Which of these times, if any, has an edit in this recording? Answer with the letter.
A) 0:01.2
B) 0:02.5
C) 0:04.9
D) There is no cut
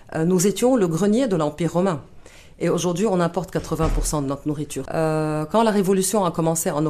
C